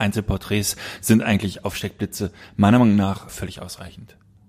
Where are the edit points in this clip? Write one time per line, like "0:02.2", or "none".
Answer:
0:03.3